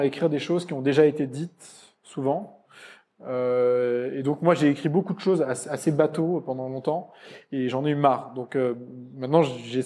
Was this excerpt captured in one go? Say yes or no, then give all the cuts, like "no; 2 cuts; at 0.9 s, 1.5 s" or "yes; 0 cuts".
yes; 0 cuts